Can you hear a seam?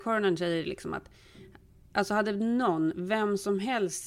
no; 0 cuts

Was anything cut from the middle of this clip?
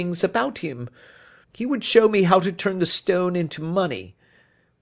yes; 1 cut; at 1.4 s

